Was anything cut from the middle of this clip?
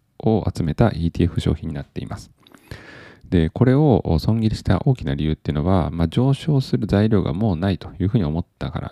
no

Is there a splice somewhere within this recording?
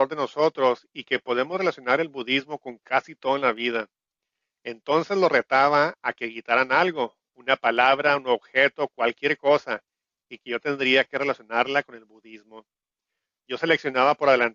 no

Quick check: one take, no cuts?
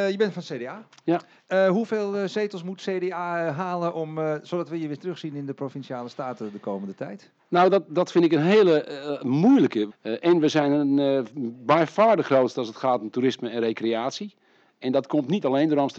no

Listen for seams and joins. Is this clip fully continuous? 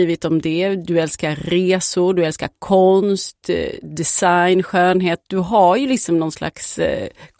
yes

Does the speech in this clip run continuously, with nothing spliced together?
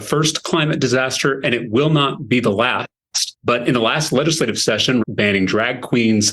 no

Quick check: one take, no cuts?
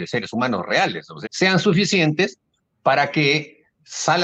no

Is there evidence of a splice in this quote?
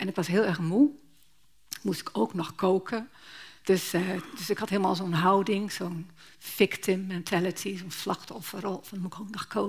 no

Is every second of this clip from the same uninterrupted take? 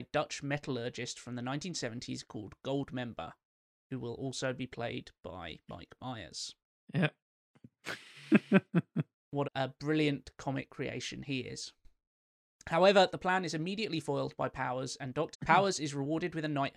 no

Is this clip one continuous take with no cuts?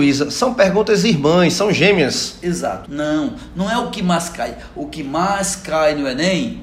no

